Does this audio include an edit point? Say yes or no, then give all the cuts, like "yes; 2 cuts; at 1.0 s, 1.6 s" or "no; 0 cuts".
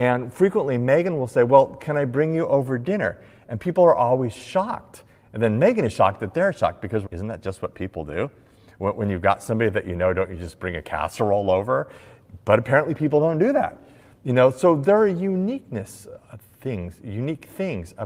yes; 1 cut; at 7.1 s